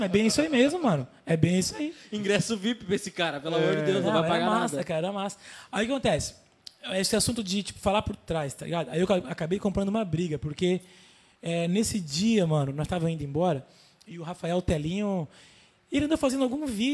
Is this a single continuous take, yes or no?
yes